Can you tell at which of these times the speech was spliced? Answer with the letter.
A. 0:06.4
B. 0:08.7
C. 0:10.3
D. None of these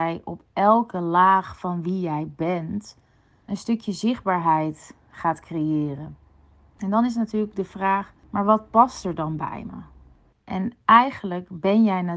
C